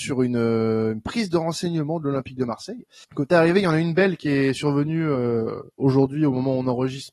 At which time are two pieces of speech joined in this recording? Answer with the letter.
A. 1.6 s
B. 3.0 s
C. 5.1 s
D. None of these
B